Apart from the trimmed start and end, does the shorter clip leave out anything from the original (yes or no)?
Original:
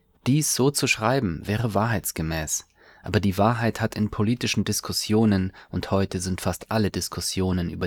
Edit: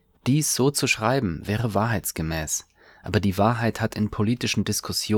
no